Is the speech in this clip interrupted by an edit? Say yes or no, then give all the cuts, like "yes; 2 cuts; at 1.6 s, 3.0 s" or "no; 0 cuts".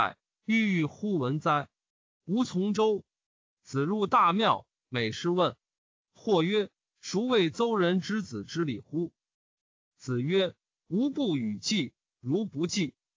yes; 1 cut; at 9.6 s